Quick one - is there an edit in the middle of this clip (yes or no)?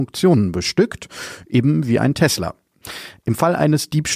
no